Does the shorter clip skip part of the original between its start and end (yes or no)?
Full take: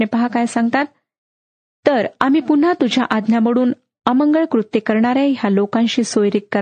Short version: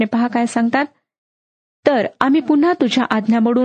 no